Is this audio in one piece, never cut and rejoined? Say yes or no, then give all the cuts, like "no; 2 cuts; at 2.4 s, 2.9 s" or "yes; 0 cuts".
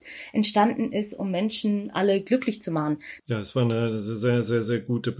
no; 1 cut; at 3.2 s